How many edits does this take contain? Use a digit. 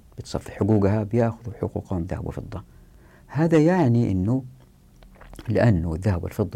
0